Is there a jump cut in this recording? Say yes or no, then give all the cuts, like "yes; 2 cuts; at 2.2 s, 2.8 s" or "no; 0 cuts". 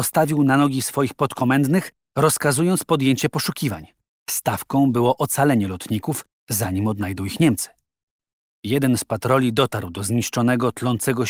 no; 0 cuts